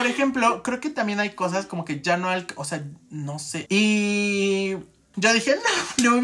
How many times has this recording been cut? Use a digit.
2